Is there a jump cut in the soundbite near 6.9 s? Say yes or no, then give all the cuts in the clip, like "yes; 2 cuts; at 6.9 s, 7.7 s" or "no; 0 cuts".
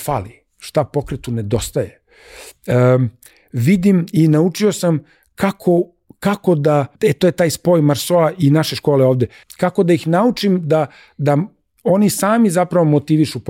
yes; 2 cuts; at 6.9 s, 9.4 s